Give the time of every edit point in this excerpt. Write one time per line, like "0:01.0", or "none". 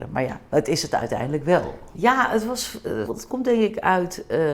0:01.9
0:03.1